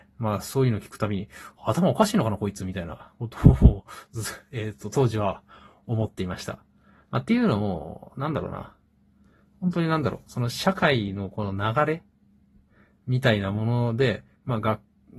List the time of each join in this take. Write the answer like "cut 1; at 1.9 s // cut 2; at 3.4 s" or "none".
none